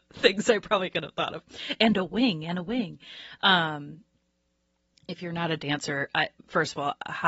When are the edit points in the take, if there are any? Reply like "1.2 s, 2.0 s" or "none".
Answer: none